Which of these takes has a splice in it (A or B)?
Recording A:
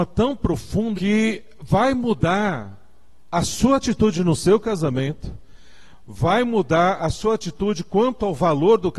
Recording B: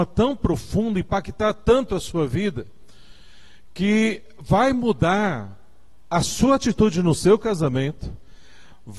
A